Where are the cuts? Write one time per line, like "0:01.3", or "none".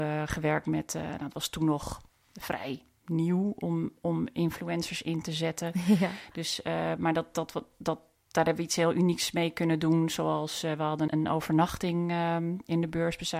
0:11.1